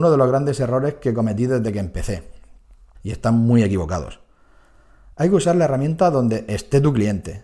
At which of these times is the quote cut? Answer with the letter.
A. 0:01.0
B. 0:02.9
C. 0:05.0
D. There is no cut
B